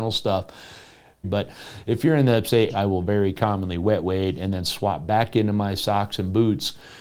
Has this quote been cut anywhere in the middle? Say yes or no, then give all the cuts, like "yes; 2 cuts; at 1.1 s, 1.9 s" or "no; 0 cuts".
yes; 2 cuts; at 1.2 s, 2.7 s